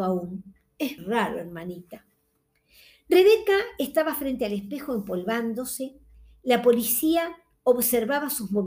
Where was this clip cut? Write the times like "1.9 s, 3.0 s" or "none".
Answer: 1.0 s